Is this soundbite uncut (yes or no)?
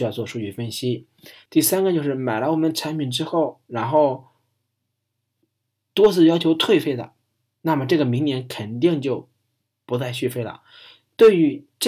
no